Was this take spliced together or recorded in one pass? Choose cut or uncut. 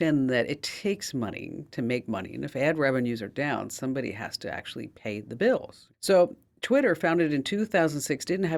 cut